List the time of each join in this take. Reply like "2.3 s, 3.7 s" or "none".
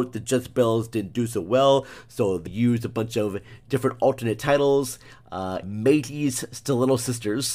2.5 s, 5.6 s